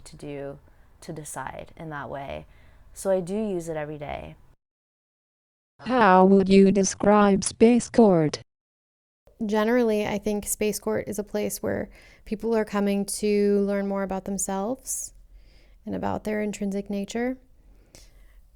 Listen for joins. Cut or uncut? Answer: uncut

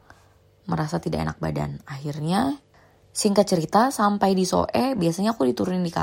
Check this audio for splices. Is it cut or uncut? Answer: uncut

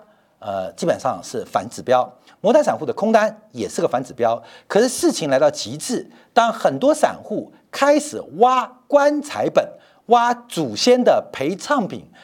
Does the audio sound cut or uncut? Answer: uncut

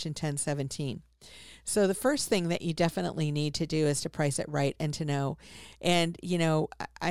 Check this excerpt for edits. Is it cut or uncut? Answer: uncut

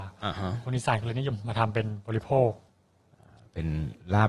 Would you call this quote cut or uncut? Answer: uncut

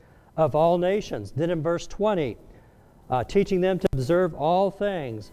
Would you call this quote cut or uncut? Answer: uncut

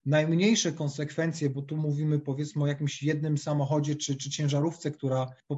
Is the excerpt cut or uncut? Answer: uncut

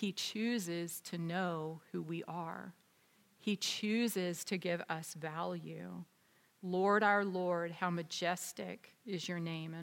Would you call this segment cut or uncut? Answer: uncut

